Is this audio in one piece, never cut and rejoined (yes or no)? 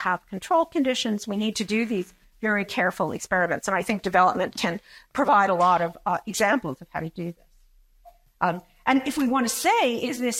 yes